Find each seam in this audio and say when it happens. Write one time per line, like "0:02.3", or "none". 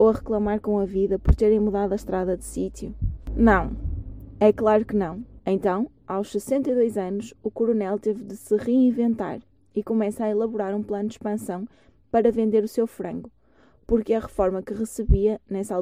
0:05.4